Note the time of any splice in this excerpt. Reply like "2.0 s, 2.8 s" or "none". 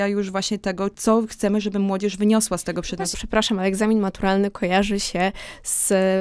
3.1 s